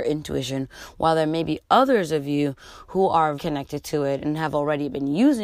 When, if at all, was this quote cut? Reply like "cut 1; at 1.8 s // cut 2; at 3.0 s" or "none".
cut 1; at 3.4 s